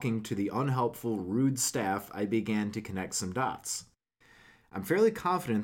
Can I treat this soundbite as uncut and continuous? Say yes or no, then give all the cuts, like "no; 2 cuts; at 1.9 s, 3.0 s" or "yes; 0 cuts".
yes; 0 cuts